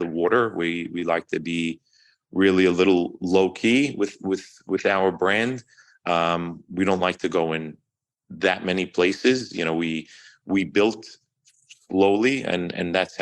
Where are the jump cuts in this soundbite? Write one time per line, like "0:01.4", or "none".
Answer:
none

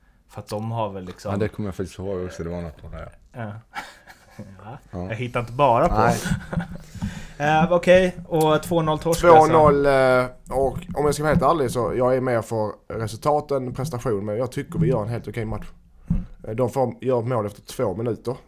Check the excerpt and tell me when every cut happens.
none

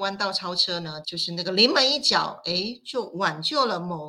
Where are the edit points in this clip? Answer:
0:01.0

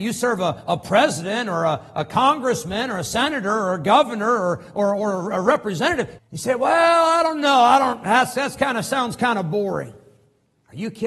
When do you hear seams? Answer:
0:06.2

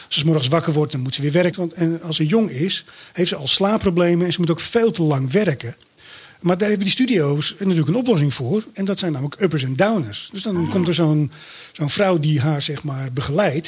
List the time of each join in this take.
0:01.5

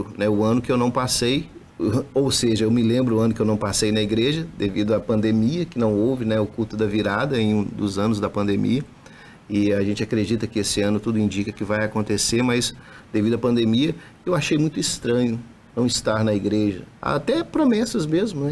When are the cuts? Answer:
0:16.9

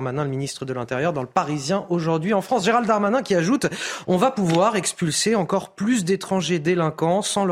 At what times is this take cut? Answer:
none

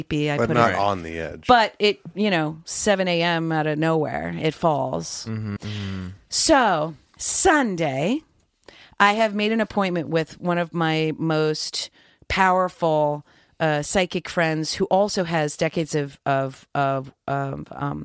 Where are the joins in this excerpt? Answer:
0:05.6

